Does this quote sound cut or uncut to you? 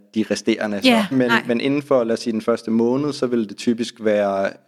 cut